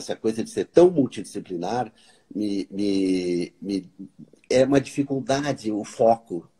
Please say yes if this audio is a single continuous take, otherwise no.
yes